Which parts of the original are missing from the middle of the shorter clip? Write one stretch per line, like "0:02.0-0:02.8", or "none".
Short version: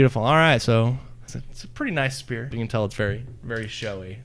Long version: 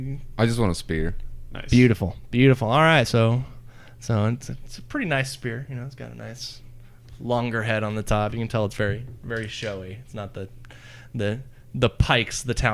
0:03.7-0:04.4
0:05.7-0:08.3